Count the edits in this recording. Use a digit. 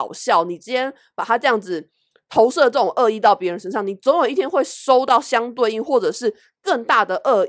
0